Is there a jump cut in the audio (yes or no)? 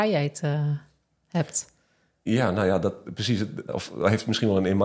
yes